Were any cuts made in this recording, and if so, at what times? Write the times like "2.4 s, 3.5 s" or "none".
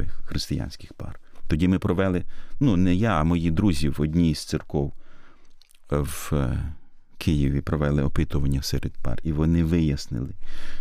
none